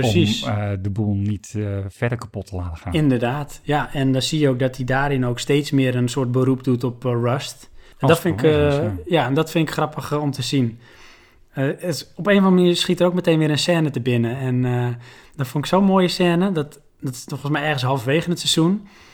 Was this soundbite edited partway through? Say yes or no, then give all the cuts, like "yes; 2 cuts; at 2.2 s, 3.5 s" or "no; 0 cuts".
no; 0 cuts